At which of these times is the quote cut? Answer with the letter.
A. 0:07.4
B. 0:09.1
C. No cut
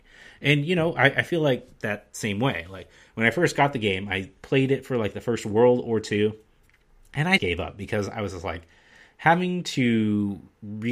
A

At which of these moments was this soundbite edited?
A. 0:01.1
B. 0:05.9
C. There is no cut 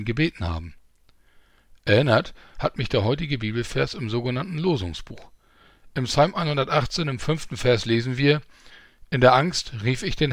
C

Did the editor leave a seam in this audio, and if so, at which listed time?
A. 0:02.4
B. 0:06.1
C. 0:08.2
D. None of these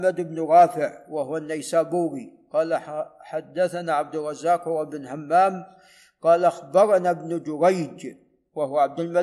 D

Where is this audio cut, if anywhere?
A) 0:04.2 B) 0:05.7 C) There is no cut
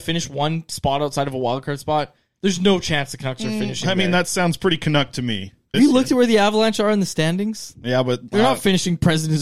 B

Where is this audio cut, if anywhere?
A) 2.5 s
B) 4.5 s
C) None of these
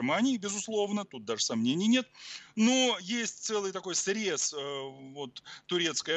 C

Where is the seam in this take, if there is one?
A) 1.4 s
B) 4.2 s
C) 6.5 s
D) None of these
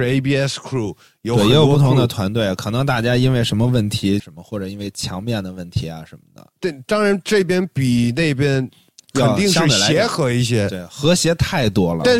B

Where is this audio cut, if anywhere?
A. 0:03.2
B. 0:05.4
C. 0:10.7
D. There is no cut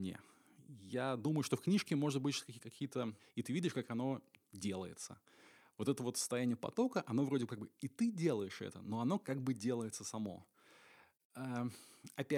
A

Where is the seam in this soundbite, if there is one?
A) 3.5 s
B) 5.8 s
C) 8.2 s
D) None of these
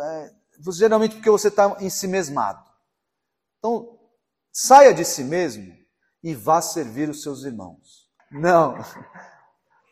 C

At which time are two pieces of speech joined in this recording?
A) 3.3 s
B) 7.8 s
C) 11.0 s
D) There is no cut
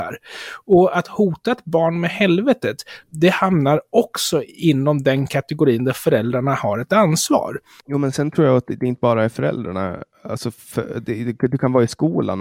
B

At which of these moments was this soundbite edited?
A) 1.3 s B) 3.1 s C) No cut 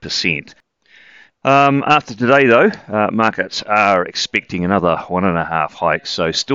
A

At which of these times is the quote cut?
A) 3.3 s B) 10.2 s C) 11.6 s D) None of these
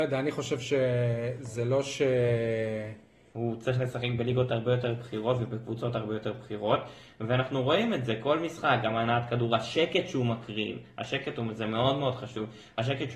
A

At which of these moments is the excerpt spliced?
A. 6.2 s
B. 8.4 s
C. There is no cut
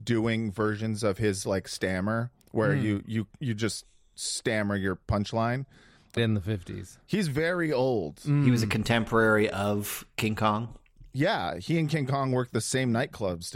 A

